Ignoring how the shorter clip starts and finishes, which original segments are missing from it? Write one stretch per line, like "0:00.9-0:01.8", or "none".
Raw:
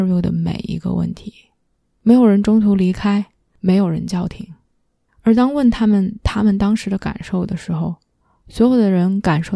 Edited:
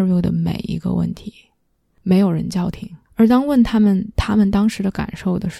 0:01.9-0:03.4
0:04.6-0:05.1